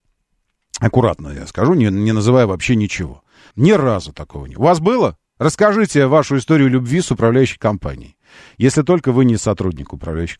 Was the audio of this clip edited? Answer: yes; 1 cut; at 3.5 s

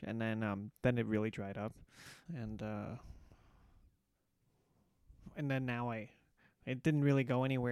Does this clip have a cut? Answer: yes; 1 cut; at 2.3 s

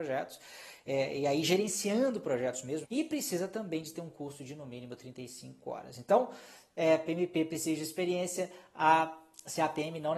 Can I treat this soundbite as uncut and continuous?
no; 1 cut; at 2.8 s

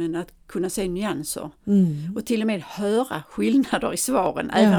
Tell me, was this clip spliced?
no; 0 cuts

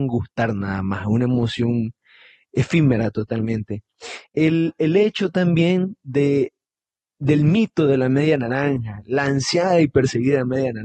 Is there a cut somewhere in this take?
no; 0 cuts

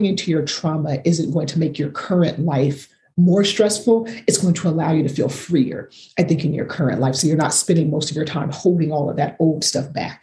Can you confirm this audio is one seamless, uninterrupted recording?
yes; 0 cuts

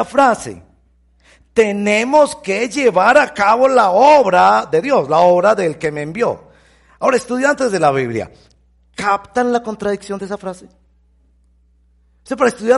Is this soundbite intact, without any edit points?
yes; 0 cuts

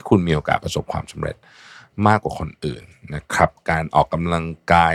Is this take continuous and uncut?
yes; 0 cuts

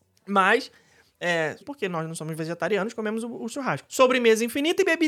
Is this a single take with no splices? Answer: no; 2 cuts; at 1.6 s, 3.9 s

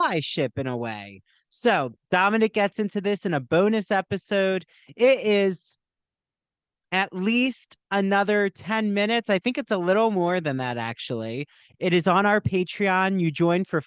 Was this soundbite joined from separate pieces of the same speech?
no; 0 cuts

